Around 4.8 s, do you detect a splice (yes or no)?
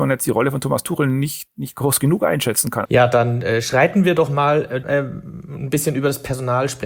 yes